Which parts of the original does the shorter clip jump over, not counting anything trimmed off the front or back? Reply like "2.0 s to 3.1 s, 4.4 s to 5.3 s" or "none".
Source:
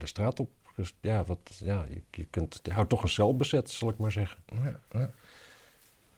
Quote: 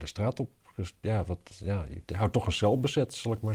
2.1 s to 2.6 s